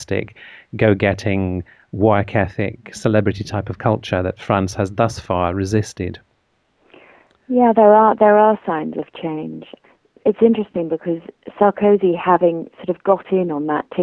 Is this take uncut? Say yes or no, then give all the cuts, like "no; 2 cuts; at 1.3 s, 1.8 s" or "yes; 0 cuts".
yes; 0 cuts